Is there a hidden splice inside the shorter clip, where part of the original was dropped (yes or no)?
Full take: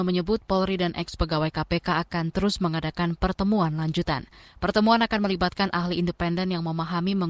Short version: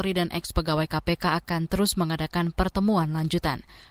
no